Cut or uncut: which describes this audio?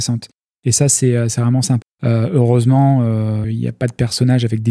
cut